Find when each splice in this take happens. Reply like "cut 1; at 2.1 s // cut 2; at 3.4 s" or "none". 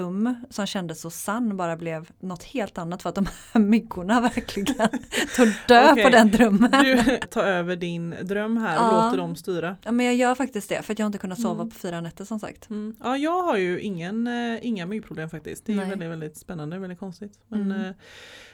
cut 1; at 7.2 s